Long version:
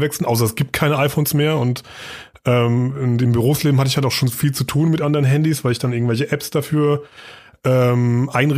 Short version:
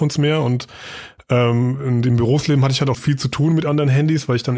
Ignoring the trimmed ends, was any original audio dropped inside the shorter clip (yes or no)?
yes